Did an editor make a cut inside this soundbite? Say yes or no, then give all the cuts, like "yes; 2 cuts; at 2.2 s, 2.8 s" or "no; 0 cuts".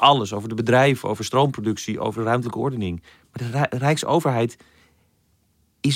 no; 0 cuts